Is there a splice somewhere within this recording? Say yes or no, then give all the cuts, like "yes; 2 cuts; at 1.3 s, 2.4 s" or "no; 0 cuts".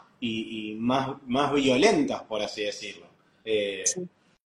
no; 0 cuts